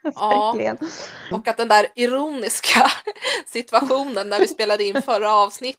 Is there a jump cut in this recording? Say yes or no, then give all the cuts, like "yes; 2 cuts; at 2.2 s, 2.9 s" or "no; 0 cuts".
yes; 1 cut; at 1.3 s